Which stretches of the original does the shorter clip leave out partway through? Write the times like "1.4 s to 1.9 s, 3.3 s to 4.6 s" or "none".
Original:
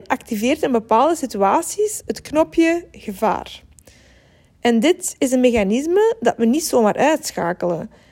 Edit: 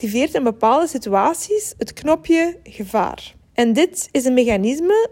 3.7 s to 4.5 s